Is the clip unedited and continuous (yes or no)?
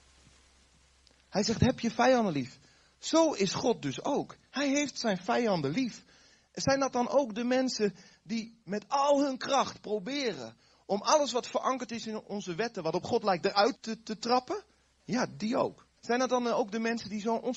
no